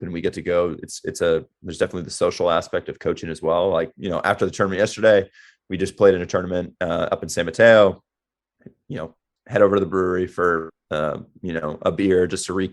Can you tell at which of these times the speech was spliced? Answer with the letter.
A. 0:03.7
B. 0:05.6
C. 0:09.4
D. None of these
C